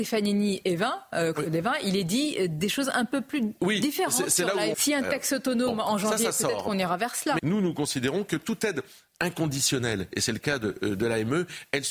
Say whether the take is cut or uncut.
cut